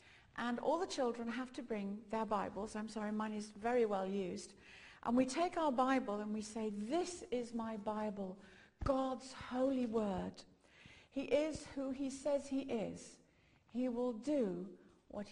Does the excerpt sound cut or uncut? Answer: uncut